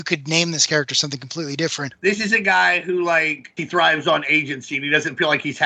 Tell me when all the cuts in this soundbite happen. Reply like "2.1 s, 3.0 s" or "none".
1.9 s, 3.6 s